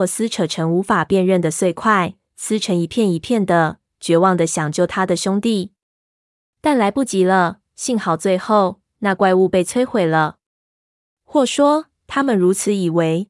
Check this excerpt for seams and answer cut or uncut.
uncut